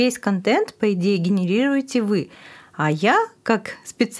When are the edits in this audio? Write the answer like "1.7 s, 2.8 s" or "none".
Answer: none

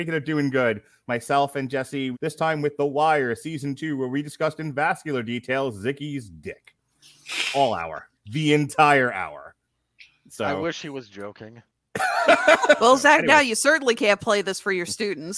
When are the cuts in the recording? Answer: 2.1 s, 12.8 s

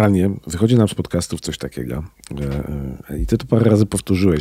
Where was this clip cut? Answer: none

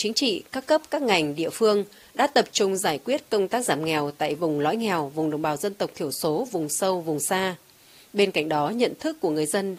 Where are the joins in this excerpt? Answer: none

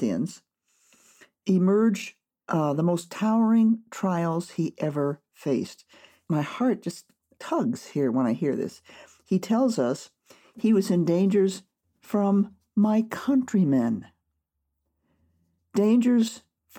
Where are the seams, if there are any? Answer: none

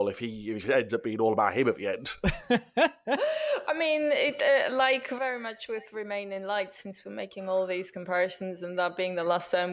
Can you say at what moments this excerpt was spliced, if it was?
none

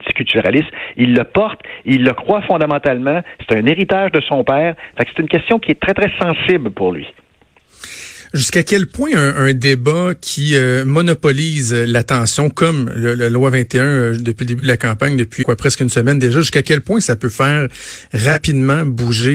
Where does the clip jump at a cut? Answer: 15.4 s

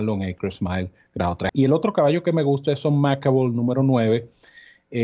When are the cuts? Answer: 1.5 s

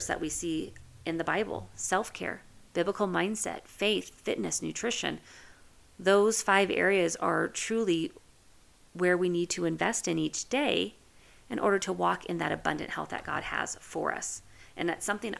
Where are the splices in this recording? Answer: none

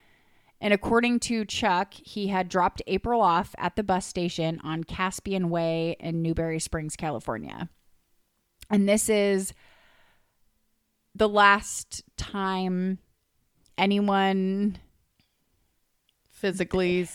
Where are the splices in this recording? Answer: none

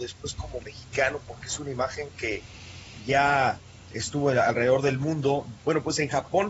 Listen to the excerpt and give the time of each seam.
5.6 s

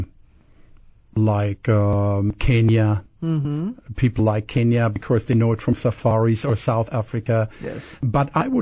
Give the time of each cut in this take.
none

